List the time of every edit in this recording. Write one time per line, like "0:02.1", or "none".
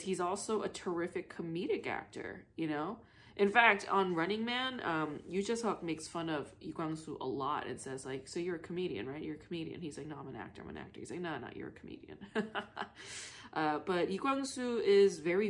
none